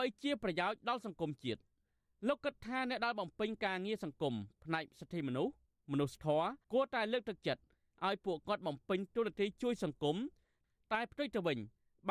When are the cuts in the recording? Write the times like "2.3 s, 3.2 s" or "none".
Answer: 6.6 s